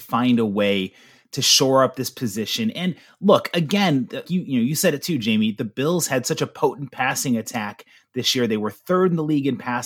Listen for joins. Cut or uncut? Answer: cut